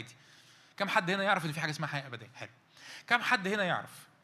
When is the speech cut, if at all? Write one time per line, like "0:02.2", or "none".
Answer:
none